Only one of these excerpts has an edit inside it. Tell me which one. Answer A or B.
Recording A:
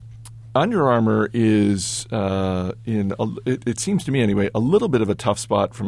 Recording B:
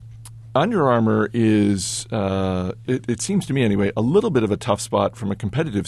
B